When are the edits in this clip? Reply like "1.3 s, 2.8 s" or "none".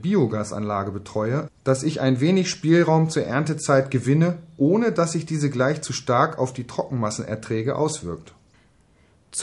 1.5 s